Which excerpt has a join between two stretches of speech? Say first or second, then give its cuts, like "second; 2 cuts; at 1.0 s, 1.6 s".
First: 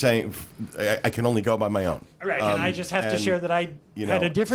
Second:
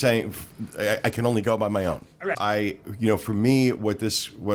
second; 1 cut; at 2.3 s